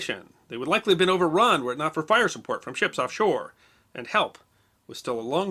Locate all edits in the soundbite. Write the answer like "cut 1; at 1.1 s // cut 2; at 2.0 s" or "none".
none